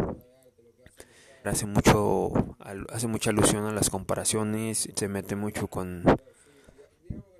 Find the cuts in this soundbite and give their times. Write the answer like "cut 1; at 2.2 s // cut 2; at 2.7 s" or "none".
cut 1; at 1.4 s // cut 2; at 4.9 s